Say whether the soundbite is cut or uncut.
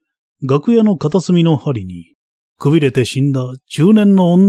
uncut